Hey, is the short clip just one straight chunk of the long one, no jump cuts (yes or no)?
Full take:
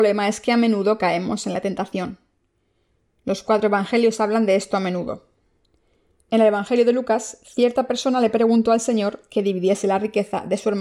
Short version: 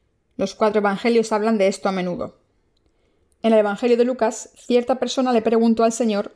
yes